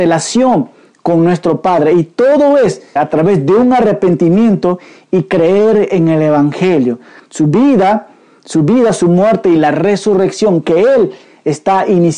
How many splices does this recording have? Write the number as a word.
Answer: two